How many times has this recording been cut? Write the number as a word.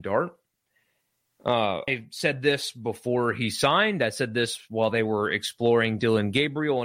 one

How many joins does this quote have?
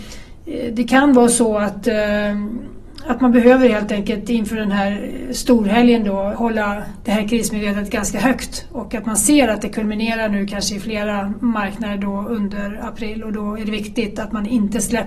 one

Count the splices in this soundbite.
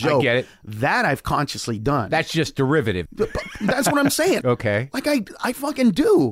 two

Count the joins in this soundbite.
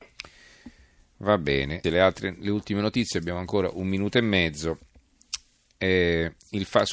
one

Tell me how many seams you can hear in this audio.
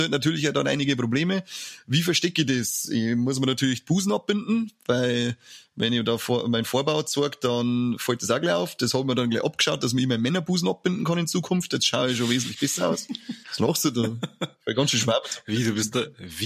one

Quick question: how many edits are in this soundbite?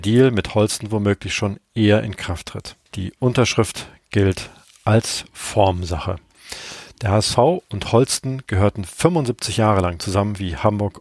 one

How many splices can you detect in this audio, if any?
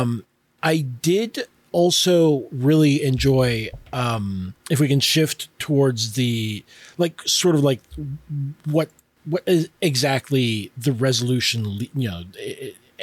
one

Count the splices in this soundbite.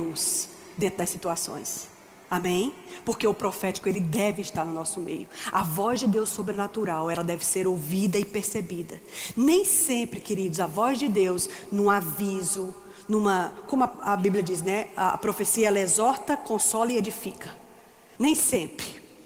one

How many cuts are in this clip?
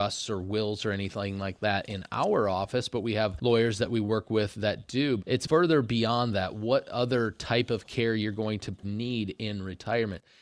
two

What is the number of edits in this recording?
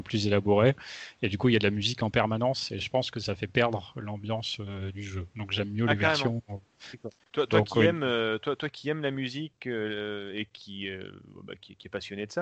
one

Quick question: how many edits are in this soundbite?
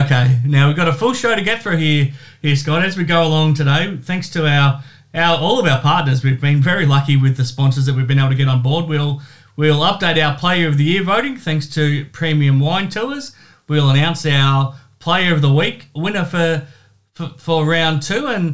zero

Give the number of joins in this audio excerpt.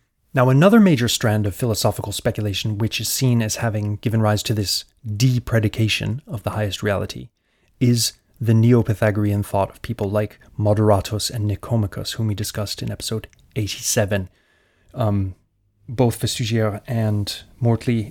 zero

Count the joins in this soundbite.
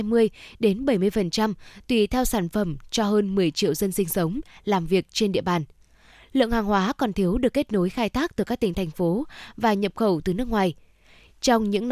zero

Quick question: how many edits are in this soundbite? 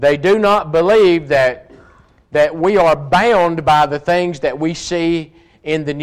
zero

